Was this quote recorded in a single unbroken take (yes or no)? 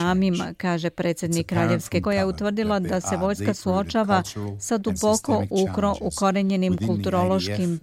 no